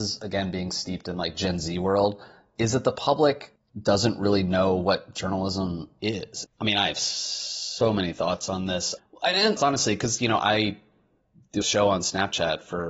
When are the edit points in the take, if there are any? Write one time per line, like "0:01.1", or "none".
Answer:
0:06.4
0:09.6
0:11.6